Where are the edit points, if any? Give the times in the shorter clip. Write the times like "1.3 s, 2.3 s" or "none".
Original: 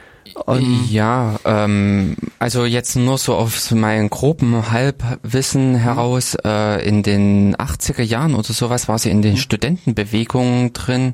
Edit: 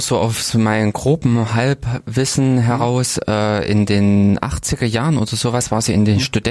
none

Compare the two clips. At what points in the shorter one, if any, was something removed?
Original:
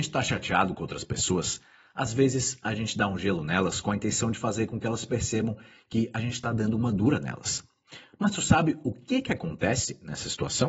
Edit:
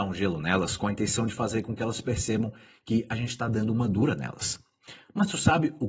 none

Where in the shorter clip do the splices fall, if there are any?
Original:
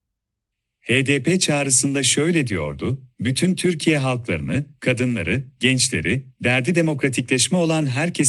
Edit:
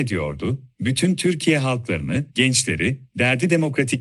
2.3 s

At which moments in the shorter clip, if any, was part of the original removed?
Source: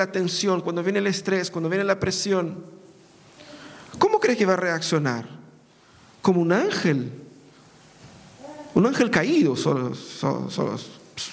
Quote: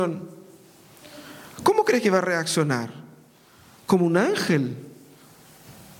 none

